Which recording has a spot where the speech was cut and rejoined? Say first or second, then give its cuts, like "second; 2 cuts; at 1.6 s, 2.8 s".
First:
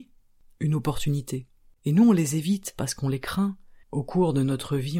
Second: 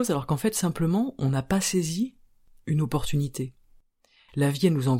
first; 2 cuts; at 1.8 s, 3.8 s